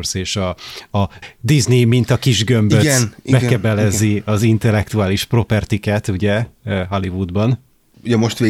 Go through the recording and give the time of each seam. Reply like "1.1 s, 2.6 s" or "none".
none